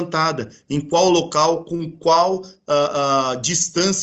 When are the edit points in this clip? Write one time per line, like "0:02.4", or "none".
none